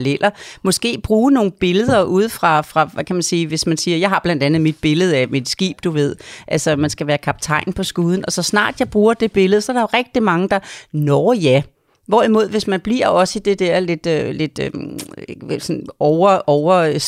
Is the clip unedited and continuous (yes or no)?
yes